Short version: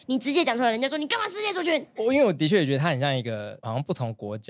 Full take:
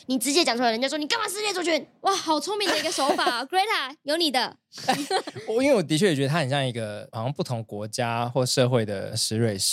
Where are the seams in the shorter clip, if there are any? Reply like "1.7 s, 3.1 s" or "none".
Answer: 2.0 s